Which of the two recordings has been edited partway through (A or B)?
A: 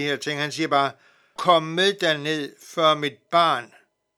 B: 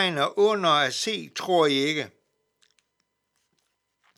A